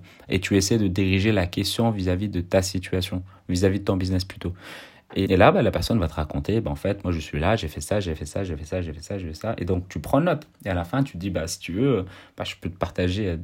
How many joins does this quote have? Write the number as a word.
one